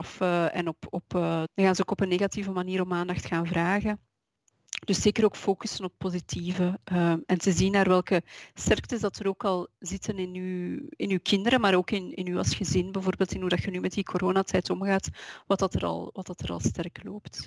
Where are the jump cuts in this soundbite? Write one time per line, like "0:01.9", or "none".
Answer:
0:01.5